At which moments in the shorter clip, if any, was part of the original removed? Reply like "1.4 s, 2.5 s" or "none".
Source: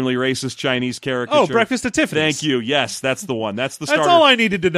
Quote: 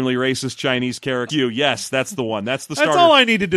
1.3 s